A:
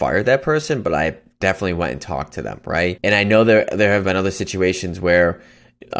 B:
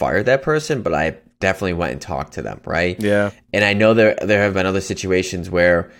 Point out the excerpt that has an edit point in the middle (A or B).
A